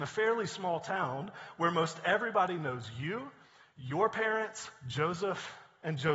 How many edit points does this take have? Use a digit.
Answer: 0